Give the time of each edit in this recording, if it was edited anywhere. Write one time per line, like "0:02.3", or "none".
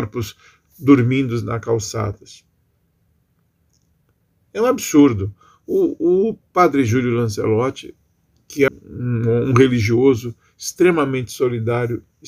0:08.7